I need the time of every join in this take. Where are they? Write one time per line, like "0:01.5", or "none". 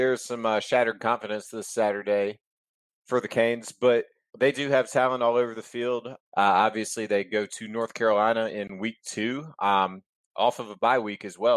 0:04.3
0:06.2